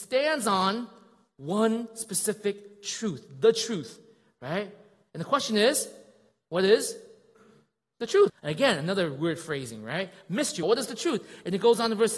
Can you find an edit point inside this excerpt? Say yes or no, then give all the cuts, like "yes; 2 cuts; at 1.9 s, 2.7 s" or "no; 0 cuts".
yes; 2 cuts; at 8.3 s, 10.6 s